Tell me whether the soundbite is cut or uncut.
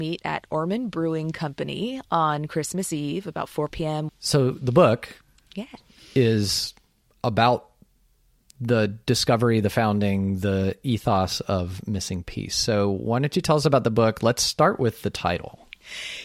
cut